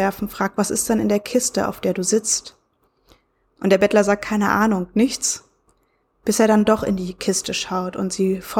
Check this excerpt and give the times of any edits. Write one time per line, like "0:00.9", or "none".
none

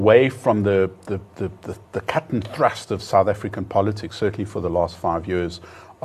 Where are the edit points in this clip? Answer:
none

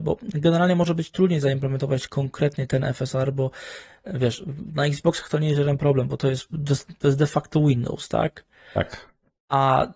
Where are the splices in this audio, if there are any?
0:06.5

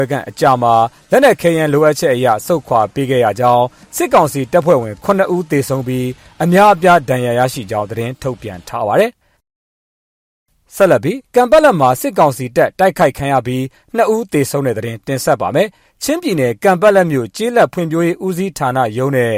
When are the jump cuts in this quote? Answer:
none

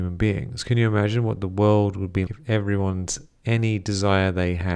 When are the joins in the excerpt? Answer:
0:02.3

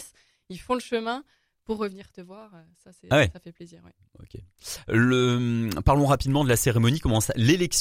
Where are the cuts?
none

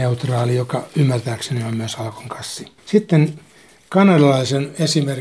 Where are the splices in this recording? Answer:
0:02.8

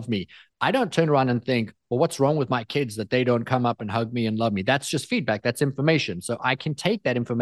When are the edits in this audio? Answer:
none

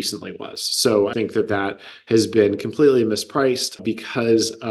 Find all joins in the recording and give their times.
0:01.1
0:03.8

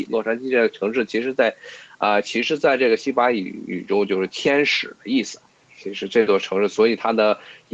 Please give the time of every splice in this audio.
none

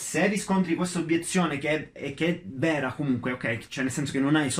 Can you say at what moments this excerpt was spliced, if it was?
none

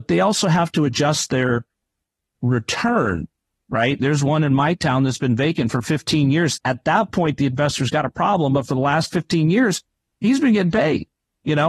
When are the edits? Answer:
0:04.0
0:06.6

